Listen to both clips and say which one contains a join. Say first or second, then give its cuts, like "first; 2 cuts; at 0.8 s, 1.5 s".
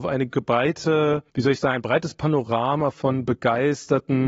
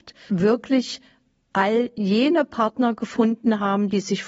first; 1 cut; at 1.3 s